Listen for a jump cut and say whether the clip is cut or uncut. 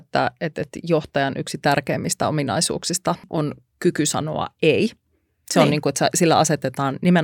uncut